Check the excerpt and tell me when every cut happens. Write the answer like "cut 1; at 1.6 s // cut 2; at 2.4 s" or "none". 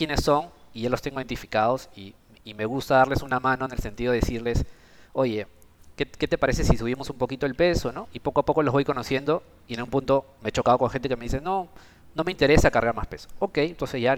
none